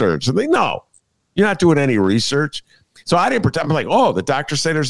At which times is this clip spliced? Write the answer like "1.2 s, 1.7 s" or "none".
none